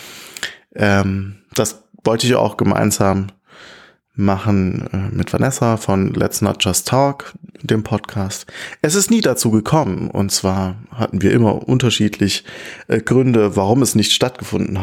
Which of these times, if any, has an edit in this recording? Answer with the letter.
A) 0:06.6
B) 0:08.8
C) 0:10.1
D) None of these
D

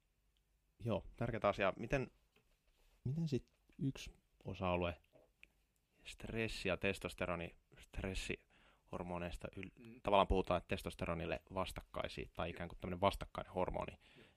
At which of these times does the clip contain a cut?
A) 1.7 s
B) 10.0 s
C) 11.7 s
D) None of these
B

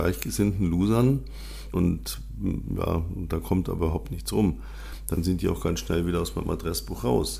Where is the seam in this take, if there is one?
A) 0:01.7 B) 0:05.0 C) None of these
A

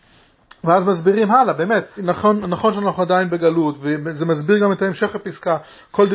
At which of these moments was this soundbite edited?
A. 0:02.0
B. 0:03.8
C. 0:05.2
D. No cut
A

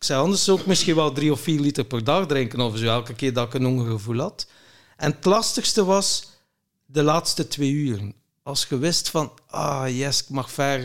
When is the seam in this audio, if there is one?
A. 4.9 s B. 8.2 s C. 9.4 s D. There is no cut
D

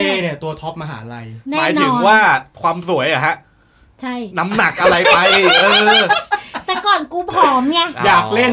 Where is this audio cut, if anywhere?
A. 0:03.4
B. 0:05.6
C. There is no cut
C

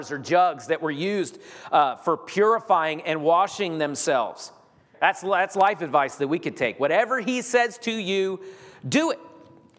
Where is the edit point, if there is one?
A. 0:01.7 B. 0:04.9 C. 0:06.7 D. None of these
B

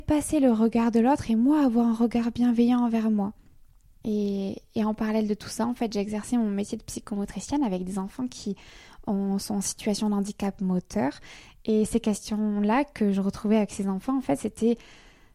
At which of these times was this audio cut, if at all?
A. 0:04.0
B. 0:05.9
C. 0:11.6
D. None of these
A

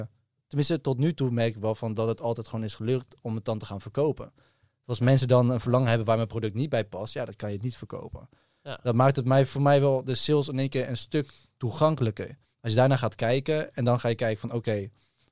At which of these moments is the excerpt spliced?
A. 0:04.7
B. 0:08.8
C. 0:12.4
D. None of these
C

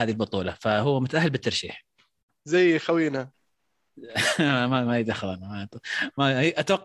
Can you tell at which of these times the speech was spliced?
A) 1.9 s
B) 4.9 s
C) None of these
B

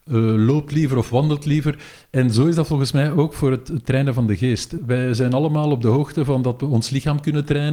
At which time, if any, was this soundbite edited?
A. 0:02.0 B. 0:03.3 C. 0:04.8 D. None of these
C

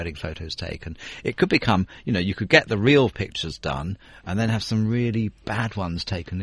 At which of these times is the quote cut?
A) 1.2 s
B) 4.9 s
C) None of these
C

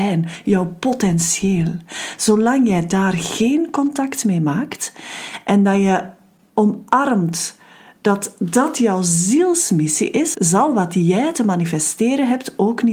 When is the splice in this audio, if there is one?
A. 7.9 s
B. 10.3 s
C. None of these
B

